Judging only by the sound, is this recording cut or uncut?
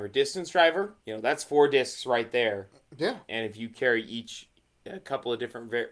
cut